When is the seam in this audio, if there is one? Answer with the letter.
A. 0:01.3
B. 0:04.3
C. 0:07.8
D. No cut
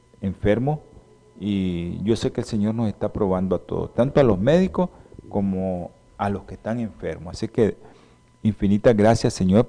D